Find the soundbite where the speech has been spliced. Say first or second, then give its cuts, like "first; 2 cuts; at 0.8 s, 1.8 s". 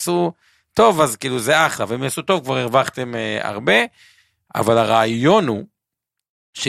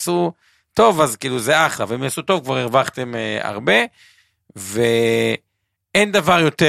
first; 1 cut; at 4.5 s